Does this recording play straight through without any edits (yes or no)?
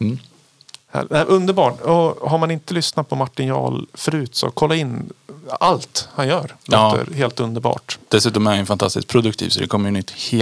yes